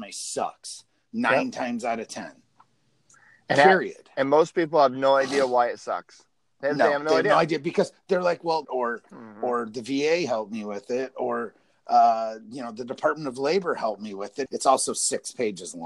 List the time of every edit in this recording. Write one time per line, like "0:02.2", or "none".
0:08.6
0:14.5